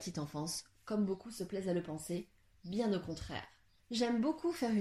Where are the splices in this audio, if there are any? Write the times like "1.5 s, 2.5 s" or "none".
3.8 s